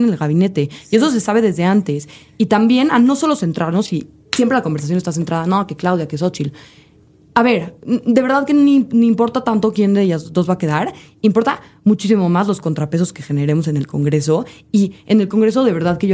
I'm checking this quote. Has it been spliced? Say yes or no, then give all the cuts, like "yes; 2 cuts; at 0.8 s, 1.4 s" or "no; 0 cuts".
no; 0 cuts